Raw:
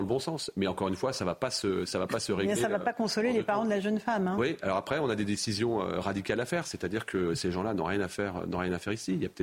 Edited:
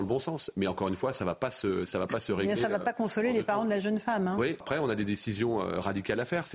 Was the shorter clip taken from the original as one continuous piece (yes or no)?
no